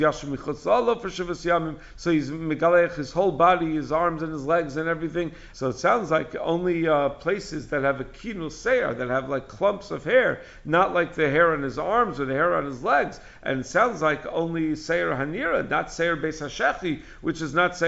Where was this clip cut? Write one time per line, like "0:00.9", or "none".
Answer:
0:05.5